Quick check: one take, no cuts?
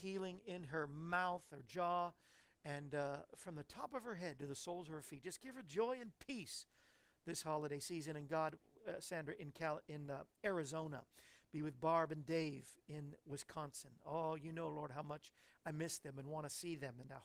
yes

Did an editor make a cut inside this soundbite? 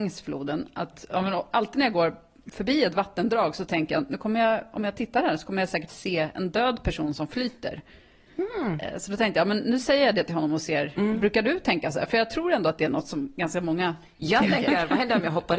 no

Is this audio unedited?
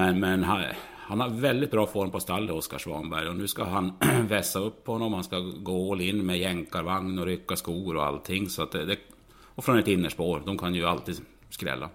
yes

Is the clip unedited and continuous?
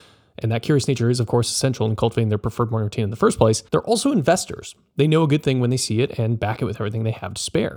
no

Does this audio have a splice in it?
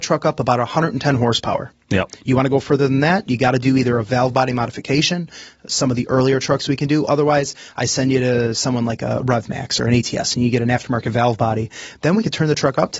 no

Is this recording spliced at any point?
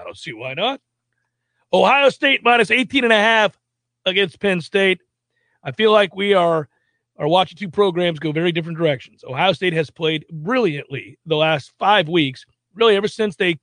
no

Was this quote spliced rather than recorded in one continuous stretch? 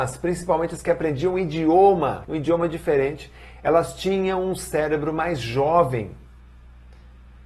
yes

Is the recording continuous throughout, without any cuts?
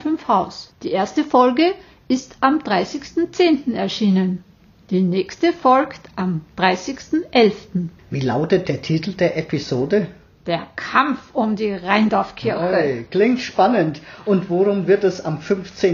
no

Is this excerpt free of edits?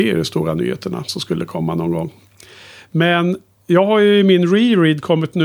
yes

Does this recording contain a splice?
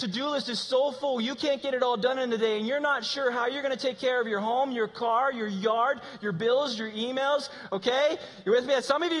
no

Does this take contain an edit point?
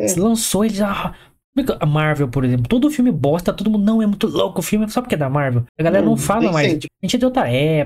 yes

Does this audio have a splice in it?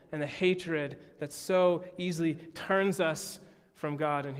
no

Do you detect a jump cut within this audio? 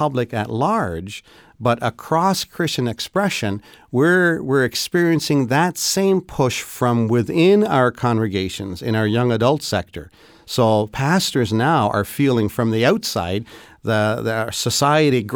no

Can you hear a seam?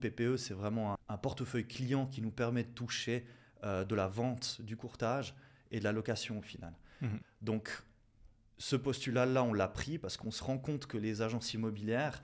yes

